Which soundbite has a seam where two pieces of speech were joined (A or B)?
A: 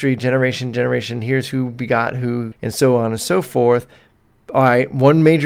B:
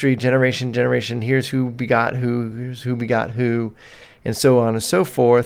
A